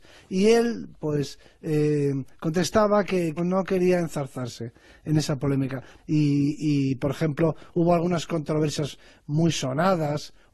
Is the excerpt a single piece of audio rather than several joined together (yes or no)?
no